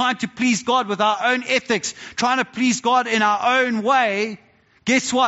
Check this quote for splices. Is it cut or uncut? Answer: uncut